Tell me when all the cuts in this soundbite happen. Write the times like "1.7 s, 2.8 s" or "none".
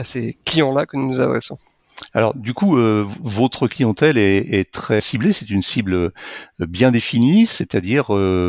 5.0 s

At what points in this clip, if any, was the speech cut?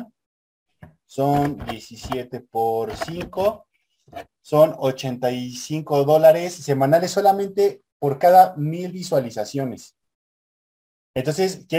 none

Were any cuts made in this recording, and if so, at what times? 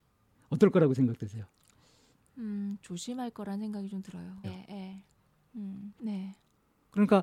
4.4 s, 6.0 s

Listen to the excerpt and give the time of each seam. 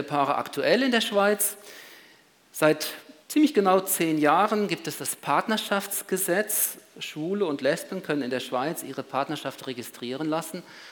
3.2 s

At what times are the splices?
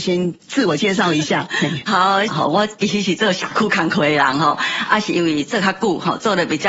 2.3 s

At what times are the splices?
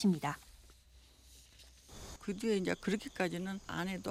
2.2 s

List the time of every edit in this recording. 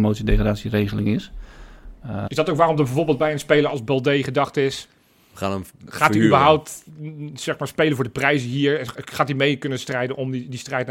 2.3 s

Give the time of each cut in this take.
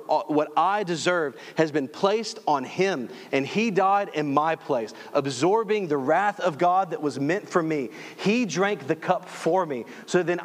none

